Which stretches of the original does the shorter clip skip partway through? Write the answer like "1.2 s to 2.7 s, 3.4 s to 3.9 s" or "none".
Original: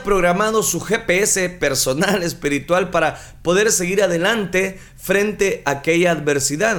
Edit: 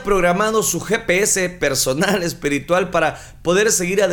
none